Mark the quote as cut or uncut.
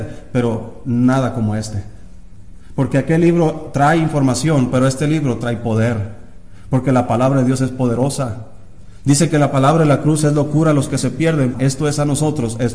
cut